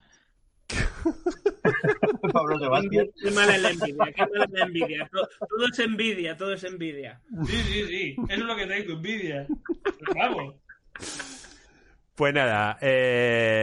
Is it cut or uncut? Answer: uncut